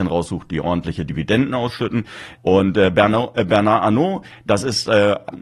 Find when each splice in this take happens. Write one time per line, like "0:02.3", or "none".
0:02.4